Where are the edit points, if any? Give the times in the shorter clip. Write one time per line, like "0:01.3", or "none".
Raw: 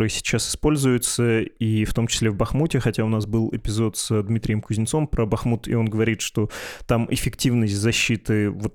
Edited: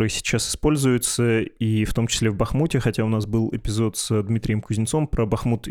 none